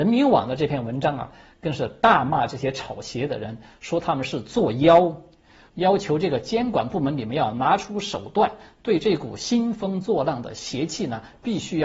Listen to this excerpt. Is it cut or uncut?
cut